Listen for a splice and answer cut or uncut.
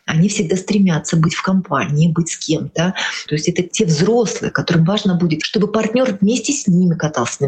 cut